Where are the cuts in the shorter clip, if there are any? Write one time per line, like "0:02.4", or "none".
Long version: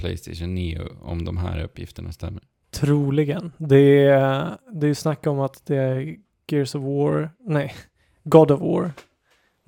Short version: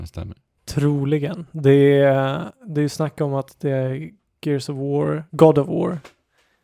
0:05.3